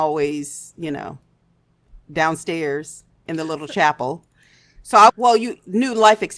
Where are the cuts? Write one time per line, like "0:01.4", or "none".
0:05.1

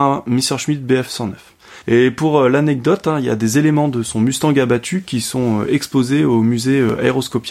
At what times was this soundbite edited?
0:01.8

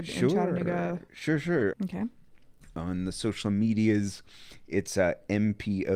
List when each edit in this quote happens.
0:01.7

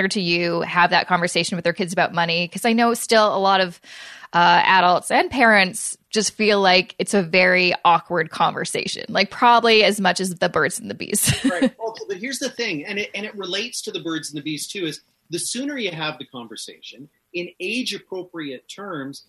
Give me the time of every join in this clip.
none

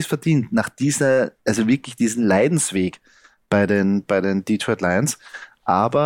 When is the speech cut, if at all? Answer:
0:01.4

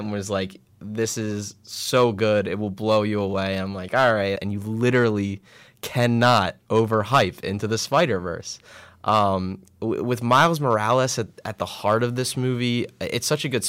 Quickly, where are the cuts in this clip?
0:04.4

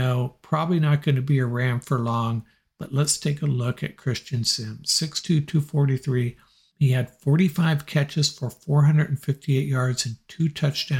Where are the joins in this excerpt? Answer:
none

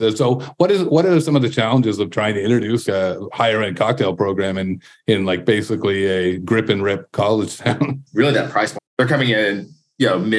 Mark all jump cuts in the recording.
0:02.9
0:08.8

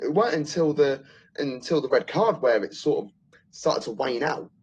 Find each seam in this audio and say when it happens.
none

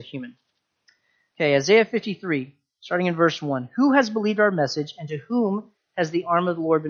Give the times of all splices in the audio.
none

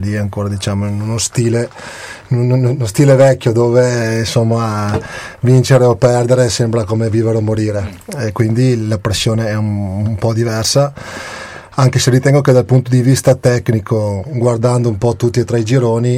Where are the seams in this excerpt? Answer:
none

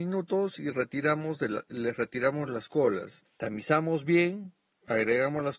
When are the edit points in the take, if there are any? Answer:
0:03.3

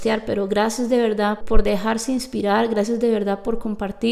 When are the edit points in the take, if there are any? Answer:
0:01.4

